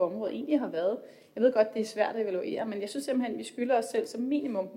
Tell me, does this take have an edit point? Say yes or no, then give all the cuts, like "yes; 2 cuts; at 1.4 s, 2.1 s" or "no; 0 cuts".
no; 0 cuts